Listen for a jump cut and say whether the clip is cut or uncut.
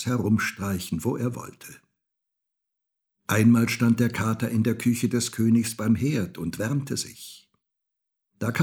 uncut